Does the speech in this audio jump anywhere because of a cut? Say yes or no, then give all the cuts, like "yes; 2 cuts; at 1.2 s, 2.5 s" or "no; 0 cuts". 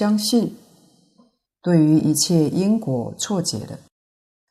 yes; 1 cut; at 1.4 s